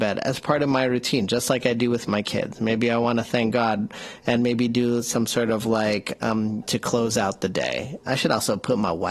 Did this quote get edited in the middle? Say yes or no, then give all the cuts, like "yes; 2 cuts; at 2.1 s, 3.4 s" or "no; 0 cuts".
yes; 2 cuts; at 6.6 s, 8.0 s